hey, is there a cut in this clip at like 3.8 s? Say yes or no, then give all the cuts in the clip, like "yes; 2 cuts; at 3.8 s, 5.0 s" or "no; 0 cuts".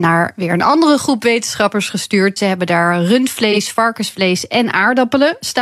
no; 1 cut; at 2.4 s